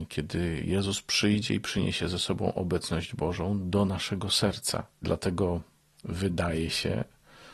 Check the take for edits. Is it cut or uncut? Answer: uncut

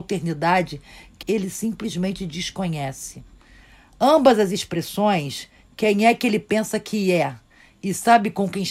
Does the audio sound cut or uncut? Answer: cut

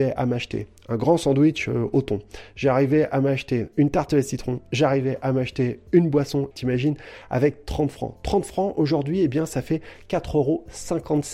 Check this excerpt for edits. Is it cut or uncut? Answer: cut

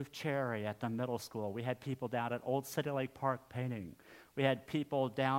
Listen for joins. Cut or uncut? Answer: uncut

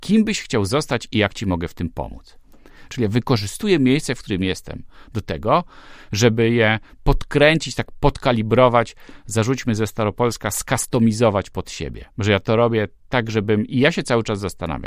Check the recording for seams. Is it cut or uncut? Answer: cut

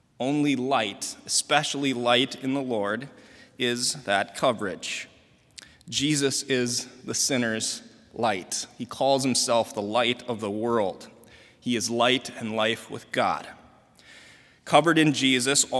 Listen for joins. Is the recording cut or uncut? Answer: uncut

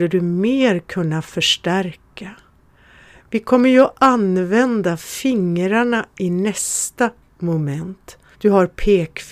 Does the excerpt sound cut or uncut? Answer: cut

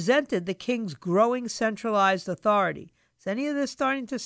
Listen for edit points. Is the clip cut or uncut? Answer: uncut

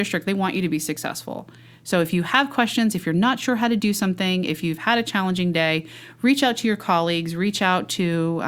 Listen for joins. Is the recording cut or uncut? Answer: uncut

